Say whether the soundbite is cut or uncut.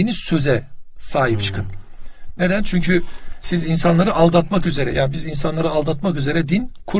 uncut